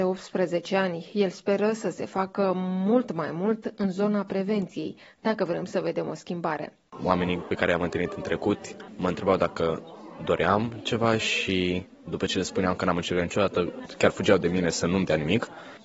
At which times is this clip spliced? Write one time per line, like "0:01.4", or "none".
none